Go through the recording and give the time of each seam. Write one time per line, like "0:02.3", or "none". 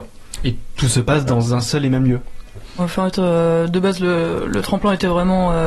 0:02.8